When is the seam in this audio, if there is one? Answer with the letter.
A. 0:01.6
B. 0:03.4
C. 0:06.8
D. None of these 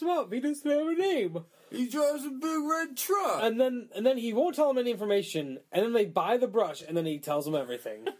D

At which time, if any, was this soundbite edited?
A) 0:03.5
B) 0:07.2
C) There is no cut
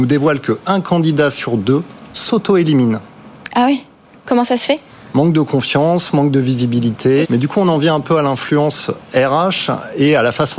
B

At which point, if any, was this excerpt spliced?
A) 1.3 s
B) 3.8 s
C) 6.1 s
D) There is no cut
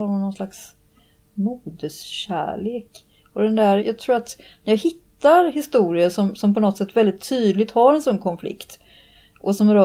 B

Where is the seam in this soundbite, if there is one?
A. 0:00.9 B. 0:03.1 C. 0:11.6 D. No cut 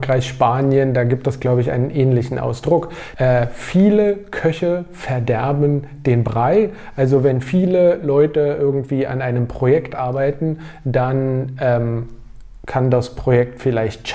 B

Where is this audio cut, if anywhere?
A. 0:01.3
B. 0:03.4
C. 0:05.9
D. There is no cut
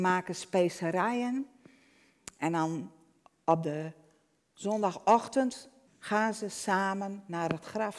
C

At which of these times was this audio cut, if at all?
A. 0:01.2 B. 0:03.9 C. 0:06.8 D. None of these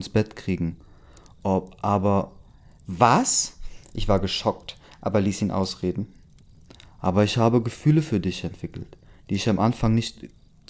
D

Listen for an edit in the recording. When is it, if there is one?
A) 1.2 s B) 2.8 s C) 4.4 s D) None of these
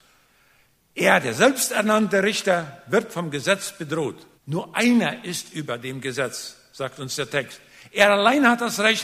C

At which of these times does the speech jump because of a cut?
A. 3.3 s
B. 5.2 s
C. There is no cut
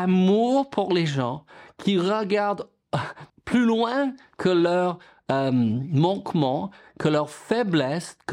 A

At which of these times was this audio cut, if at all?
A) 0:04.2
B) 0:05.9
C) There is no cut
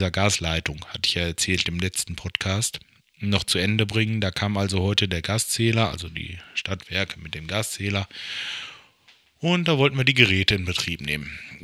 C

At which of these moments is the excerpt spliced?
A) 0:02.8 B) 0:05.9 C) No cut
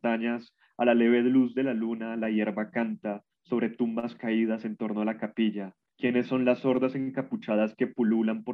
B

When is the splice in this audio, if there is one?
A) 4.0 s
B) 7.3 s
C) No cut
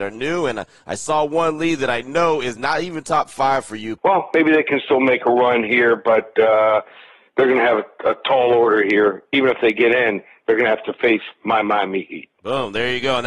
A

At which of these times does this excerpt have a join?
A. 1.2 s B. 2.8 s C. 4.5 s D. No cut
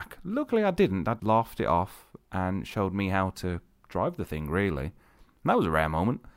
A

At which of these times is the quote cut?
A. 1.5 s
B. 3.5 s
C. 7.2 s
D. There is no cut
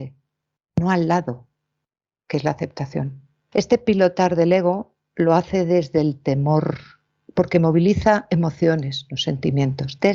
B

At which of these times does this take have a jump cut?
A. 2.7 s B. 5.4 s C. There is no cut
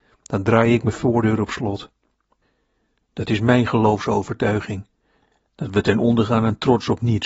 C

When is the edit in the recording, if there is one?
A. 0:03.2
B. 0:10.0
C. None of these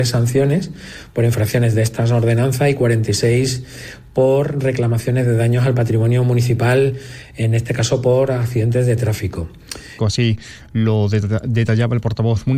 B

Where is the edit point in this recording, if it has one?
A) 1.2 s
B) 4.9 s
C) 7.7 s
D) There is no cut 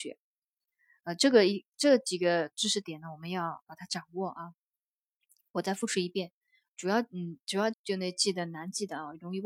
C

